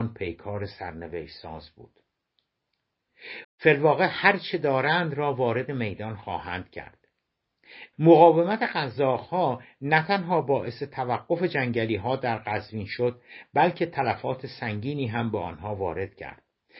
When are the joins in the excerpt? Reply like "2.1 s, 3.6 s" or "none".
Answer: 3.4 s, 7.9 s